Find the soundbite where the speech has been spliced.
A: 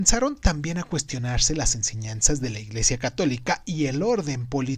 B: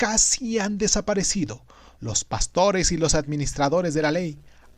B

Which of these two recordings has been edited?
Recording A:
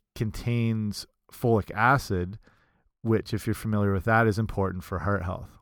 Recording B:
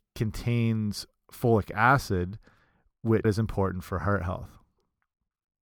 B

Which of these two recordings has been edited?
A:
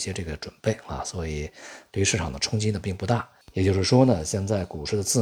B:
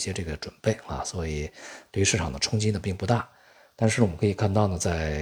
A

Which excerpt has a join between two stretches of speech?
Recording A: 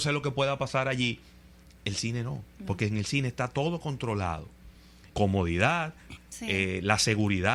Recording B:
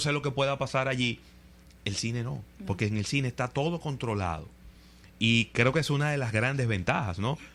A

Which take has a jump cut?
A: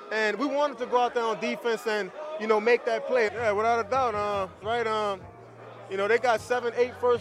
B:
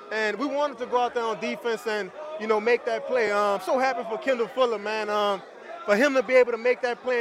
A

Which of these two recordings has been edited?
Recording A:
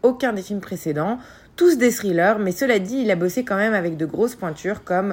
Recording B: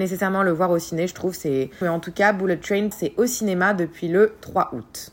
B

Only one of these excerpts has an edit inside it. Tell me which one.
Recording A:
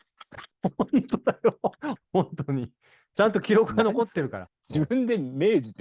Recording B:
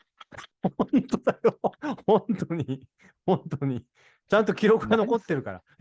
A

